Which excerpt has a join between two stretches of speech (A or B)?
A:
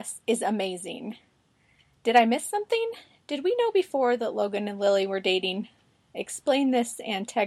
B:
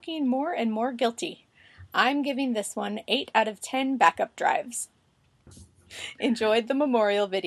B